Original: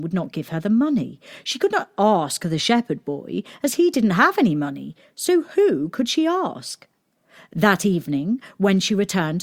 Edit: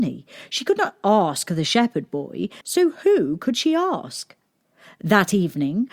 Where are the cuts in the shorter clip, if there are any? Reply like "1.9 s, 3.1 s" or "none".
2.6 s